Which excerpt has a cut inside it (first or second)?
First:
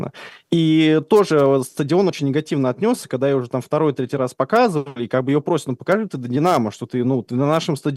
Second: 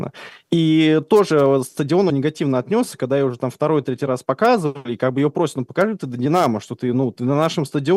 second